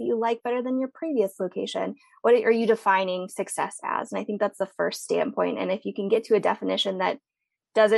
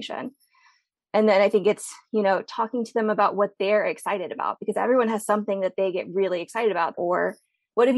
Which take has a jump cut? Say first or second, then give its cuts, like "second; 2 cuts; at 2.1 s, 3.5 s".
second; 1 cut; at 6.9 s